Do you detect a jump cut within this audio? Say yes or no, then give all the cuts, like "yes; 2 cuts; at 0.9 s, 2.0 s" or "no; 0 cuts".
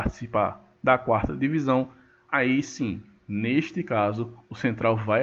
no; 0 cuts